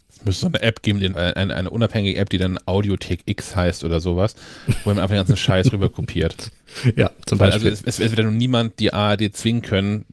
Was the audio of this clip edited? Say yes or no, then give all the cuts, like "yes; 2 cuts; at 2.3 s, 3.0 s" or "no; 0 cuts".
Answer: yes; 1 cut; at 1.1 s